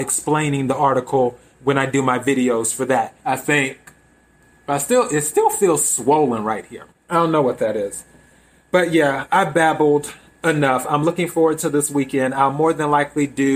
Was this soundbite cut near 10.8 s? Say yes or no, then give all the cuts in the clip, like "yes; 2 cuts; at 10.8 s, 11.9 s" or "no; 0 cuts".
no; 2 cuts; at 3.2 s, 6.9 s